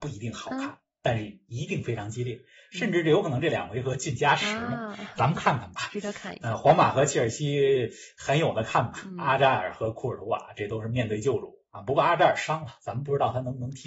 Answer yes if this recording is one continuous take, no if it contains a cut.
yes